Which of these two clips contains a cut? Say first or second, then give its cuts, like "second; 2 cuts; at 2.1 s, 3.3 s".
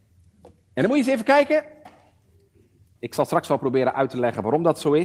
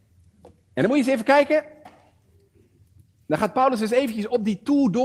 first; 1 cut; at 2.9 s